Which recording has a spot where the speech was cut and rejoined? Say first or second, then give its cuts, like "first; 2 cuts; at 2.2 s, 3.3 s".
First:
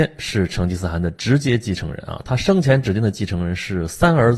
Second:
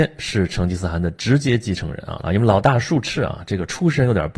second; 1 cut; at 2.2 s